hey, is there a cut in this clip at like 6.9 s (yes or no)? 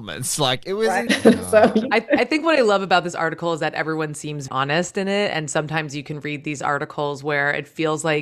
no